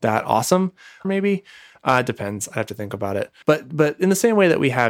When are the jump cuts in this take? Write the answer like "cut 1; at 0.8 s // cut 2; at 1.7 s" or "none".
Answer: cut 1; at 1.0 s // cut 2; at 3.4 s